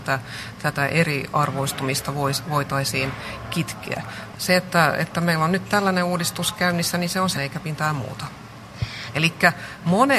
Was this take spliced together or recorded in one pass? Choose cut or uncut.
cut